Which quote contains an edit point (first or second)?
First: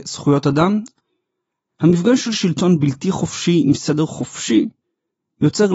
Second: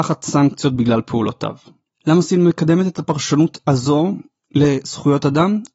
second